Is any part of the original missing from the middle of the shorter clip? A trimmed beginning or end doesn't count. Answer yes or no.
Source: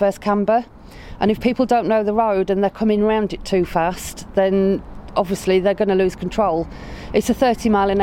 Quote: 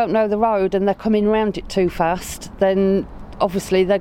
no